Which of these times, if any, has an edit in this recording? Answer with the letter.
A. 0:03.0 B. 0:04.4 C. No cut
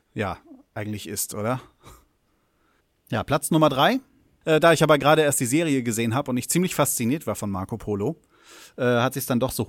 B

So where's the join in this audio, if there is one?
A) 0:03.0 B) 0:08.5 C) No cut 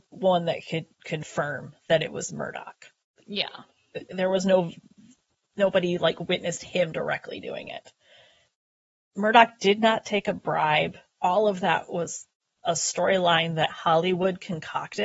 C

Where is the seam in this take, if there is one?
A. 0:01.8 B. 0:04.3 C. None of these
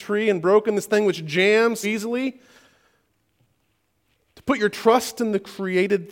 A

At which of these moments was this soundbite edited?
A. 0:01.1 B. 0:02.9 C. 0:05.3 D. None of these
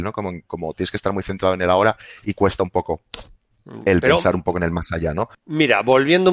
C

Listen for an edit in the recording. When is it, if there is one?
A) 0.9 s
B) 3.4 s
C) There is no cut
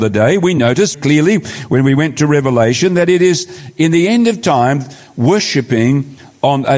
A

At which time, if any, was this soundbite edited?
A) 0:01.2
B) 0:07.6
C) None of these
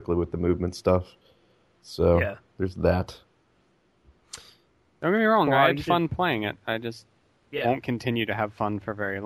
C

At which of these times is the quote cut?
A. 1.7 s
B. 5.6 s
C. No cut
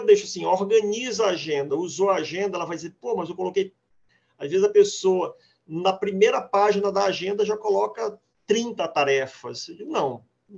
A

